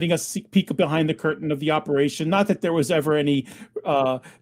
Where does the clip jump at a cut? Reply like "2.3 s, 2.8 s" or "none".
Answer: none